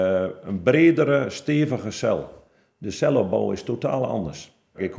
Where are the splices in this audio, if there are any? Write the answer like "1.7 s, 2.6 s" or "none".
none